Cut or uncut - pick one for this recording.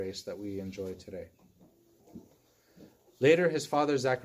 uncut